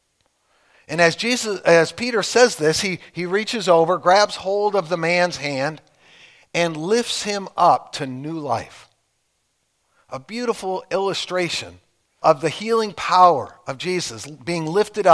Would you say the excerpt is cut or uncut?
cut